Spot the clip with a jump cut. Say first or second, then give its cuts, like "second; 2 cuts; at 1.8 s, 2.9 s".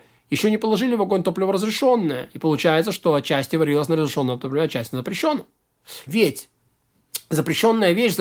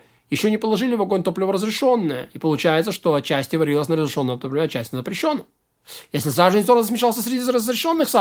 first; 1 cut; at 6.1 s